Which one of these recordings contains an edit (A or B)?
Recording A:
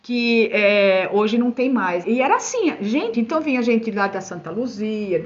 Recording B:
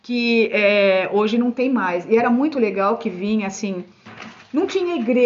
A